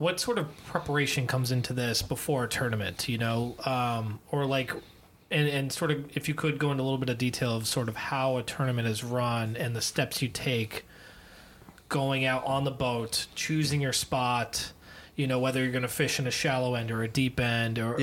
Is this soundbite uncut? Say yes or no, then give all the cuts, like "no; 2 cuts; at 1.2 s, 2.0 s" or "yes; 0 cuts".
yes; 0 cuts